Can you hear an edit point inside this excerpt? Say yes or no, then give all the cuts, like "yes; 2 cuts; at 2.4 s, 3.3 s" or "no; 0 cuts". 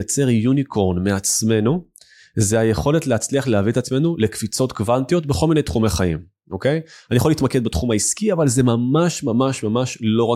no; 0 cuts